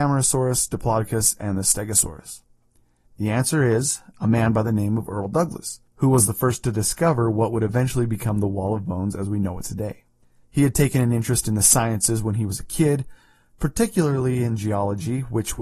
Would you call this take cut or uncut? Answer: cut